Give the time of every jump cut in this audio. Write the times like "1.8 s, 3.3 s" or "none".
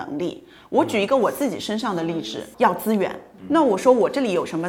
2.5 s